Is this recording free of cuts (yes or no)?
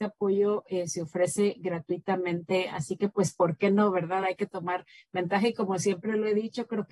yes